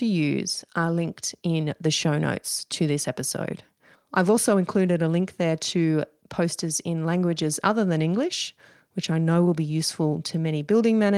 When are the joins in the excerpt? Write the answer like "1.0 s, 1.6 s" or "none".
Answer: 3.9 s